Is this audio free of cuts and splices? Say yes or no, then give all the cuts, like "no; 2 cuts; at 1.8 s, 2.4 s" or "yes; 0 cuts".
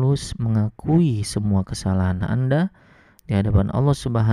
no; 1 cut; at 3.2 s